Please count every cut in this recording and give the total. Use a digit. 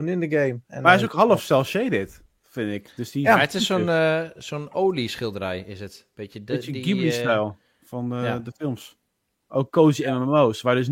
1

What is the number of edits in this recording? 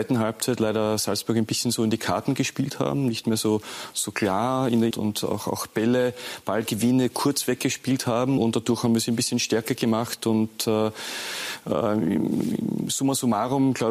2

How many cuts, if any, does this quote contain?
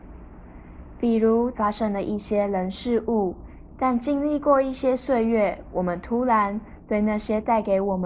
2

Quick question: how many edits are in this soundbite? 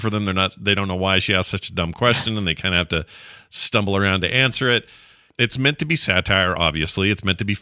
1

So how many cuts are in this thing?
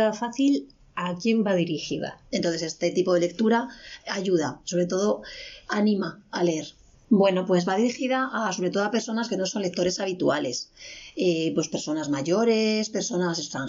2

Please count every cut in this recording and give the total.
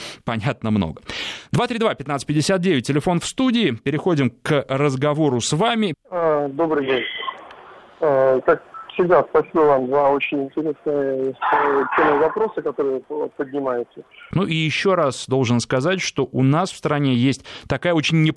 2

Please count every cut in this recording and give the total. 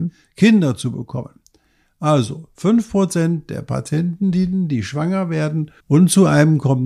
1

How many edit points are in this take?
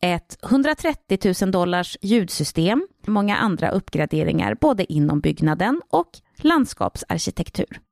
1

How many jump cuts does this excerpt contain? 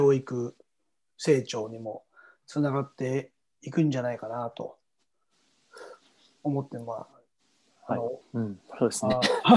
1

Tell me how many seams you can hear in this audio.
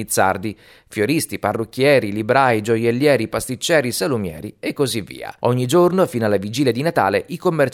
1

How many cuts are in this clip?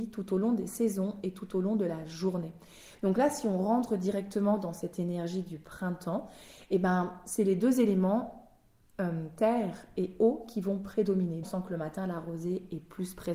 1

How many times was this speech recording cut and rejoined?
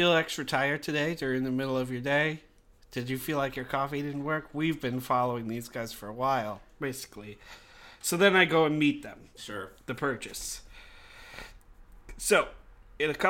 1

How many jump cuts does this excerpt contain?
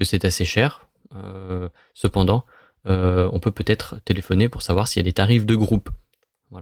0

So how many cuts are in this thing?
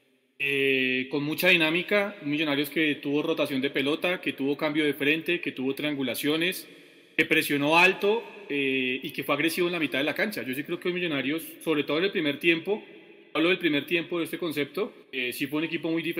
1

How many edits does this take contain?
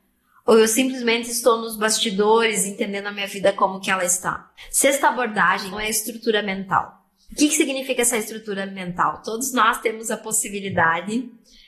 1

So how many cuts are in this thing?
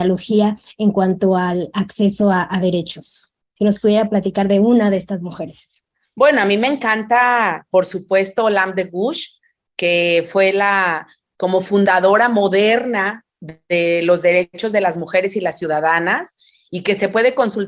0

